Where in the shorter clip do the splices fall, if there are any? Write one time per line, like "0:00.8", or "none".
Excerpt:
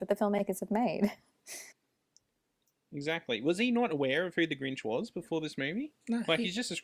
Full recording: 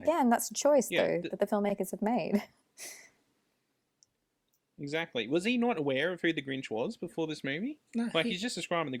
0:01.7